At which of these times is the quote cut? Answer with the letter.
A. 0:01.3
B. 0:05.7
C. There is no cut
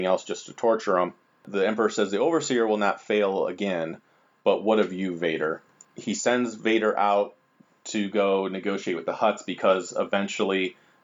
C